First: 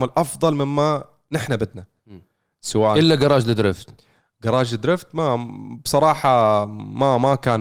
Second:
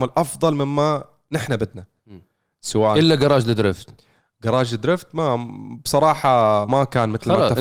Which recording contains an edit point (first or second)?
second